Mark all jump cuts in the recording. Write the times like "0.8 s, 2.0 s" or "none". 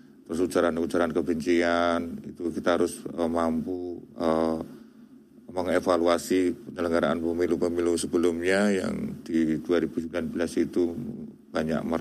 none